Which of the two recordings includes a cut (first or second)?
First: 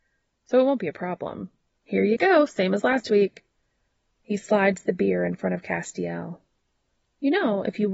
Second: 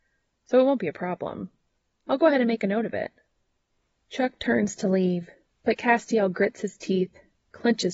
first